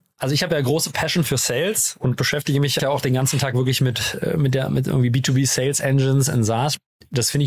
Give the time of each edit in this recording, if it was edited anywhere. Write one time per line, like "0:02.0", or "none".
0:02.8